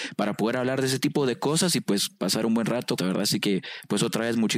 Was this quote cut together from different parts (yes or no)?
yes